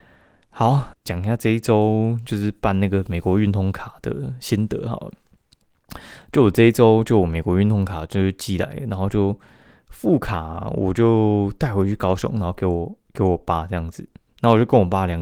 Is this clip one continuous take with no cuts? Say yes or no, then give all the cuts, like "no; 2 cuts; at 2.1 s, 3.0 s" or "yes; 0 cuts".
no; 1 cut; at 0.9 s